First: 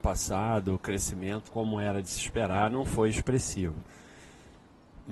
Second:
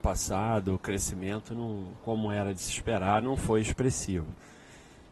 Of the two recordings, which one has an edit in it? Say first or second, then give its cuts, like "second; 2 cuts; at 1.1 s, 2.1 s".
first; 1 cut; at 1.5 s